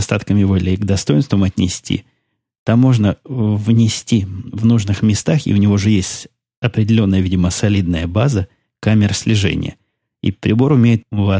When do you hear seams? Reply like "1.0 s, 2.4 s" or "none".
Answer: none